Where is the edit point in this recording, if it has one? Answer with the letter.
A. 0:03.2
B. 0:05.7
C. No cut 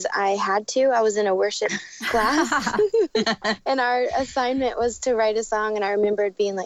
A